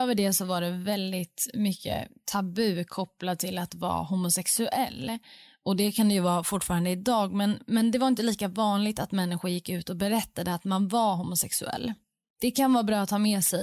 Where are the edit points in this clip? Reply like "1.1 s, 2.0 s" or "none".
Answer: none